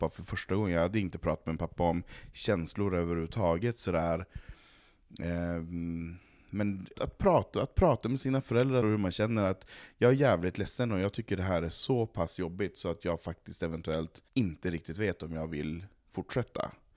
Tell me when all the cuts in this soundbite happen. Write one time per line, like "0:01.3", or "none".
0:06.9
0:08.8
0:14.3